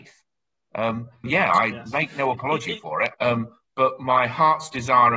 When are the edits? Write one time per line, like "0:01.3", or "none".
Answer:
0:01.2
0:03.1